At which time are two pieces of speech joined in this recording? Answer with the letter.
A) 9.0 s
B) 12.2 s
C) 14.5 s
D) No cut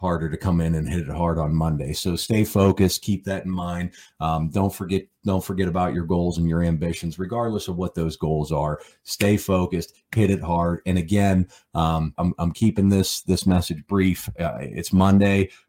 B